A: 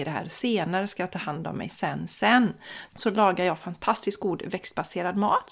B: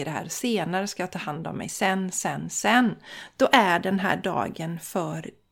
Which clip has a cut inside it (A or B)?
A